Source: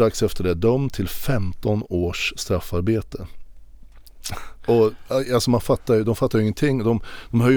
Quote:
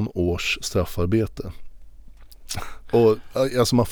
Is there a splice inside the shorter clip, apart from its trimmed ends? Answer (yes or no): no